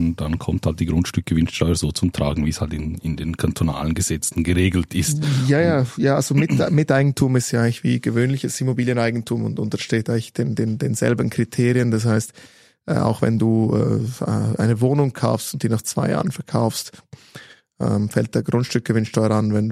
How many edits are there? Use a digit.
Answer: 0